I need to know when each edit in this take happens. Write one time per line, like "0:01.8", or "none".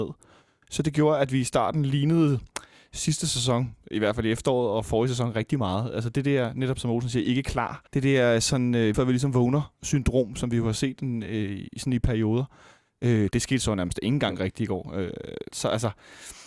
0:07.9
0:08.9
0:15.5